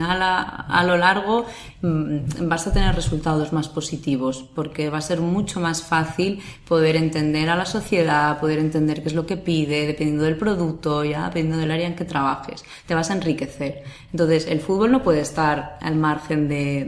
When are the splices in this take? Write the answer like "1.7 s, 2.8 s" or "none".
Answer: none